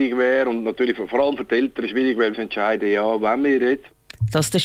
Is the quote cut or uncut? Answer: cut